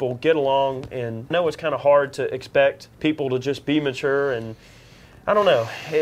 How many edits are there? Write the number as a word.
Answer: two